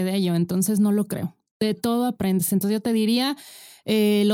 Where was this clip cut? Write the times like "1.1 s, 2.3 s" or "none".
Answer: none